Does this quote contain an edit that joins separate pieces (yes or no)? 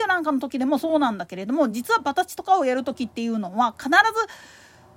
no